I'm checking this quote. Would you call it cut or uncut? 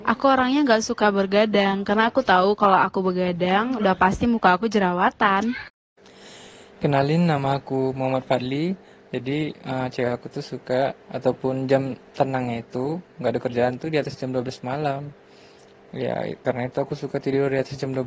cut